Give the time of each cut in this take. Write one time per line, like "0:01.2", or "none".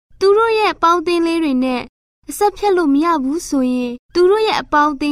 0:04.0